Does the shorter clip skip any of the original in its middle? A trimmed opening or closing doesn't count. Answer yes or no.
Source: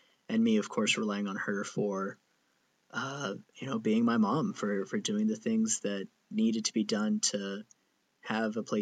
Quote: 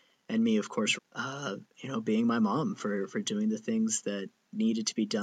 yes